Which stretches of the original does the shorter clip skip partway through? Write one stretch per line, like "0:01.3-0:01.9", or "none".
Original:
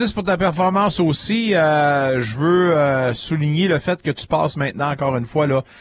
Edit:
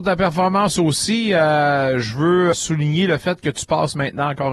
0:02.7-0:03.1

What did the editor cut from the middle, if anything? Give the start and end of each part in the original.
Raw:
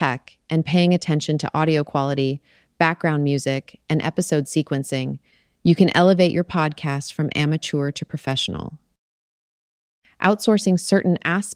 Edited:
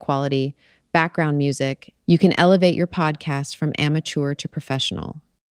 0:03.8-0:05.5

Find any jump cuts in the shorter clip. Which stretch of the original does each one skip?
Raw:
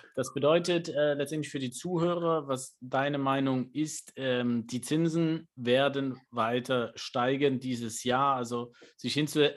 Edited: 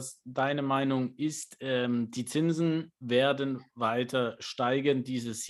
none

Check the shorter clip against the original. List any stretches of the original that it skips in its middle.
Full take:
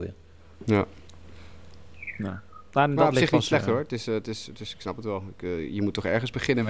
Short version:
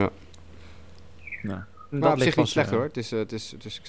0:02.7-0:02.9

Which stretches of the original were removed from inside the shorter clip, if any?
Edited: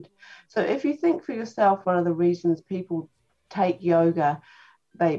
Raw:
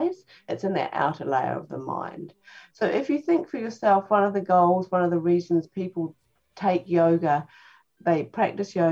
0:04.1-0:04.9

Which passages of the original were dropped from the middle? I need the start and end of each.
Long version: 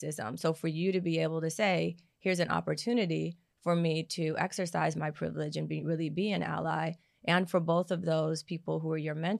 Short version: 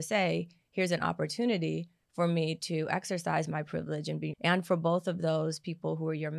0:05.8-0:07.2

